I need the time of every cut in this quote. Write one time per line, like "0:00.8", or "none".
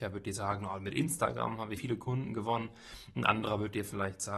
0:01.8